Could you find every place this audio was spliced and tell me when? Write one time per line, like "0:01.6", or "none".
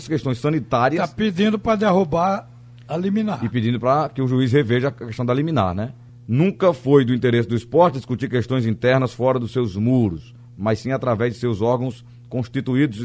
0:06.1